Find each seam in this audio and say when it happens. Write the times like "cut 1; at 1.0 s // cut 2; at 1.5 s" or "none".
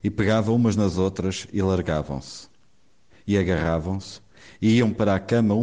cut 1; at 3.1 s